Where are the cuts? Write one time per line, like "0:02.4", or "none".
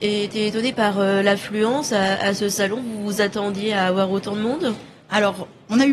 none